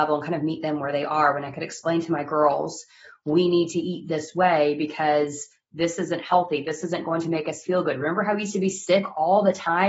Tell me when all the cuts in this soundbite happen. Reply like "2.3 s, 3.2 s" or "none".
none